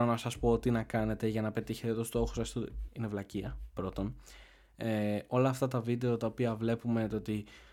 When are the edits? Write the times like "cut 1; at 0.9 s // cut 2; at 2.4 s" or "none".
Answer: cut 1; at 2.9 s